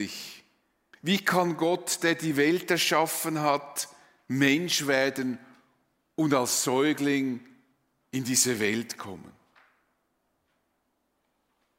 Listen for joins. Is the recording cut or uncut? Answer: cut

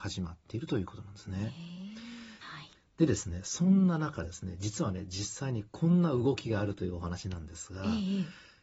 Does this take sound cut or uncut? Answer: cut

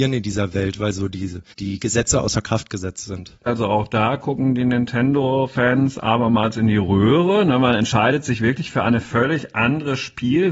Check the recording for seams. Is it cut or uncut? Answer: cut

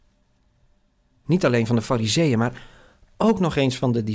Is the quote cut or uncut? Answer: uncut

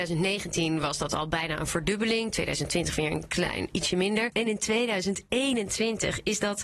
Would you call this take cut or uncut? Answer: uncut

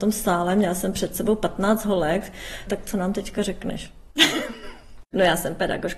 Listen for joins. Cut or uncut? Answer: cut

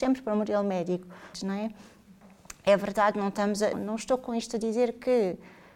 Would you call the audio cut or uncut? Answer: cut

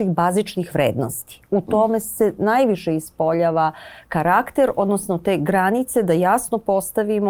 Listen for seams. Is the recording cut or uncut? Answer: uncut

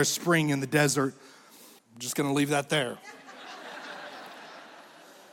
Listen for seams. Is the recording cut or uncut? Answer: cut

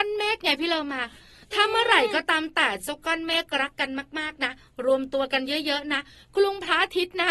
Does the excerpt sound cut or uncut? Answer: uncut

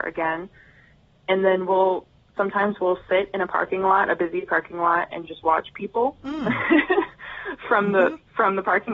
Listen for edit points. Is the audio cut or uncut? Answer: uncut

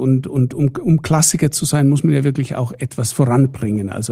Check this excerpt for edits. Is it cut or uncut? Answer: uncut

